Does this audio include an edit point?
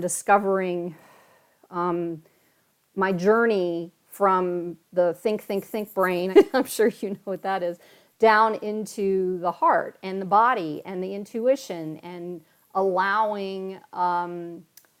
yes; 1 cut; at 6.3 s

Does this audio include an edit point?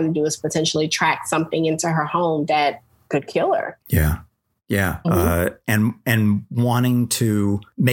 yes; 2 cuts; at 3.8 s, 5.0 s

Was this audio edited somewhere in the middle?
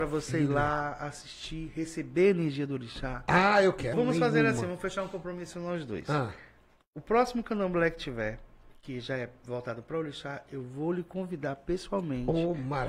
yes; 1 cut; at 3.9 s

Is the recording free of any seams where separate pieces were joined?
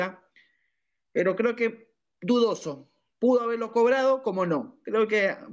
yes; 0 cuts

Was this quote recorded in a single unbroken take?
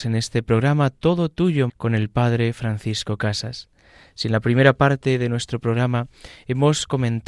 no; 1 cut; at 1.7 s

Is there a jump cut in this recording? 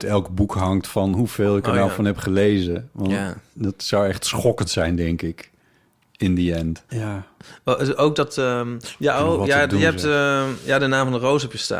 yes; 1 cut; at 6.9 s

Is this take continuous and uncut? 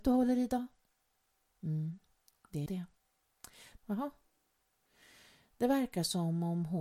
no; 2 cuts; at 2.7 s, 3.8 s

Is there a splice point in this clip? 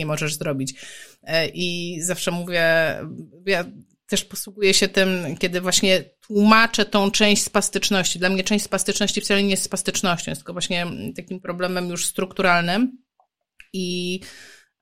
no; 0 cuts

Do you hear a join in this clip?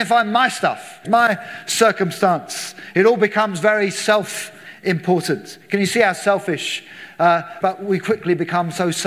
yes; 2 cuts; at 1.0 s, 7.6 s

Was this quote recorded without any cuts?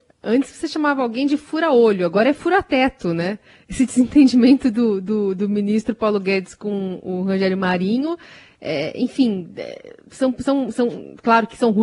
yes; 0 cuts

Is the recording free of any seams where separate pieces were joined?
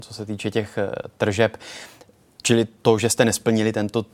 yes; 0 cuts

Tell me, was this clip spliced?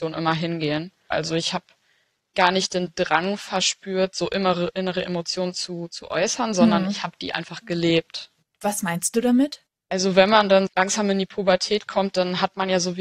yes; 2 cuts; at 1.1 s, 10.7 s

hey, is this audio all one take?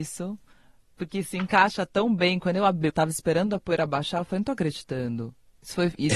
no; 1 cut; at 2.9 s

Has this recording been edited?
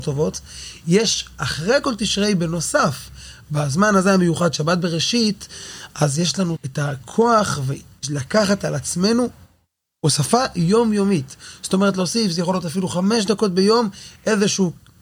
yes; 1 cut; at 6.6 s

